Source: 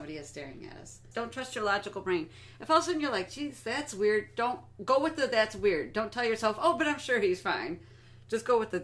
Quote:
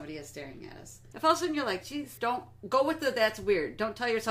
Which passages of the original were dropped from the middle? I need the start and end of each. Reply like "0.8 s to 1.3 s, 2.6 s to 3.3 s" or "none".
1.1 s to 2.6 s, 3.6 s to 4.3 s